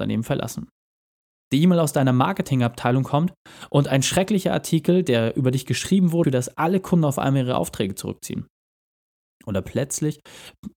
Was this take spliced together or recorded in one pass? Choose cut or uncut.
cut